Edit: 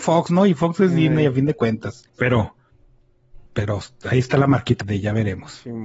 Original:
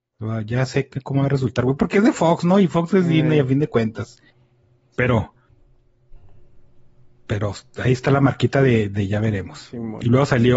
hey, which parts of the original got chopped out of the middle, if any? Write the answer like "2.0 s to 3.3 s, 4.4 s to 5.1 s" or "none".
4.2 s to 4.9 s, 6.2 s to 7.2 s, 8.5 s to 8.9 s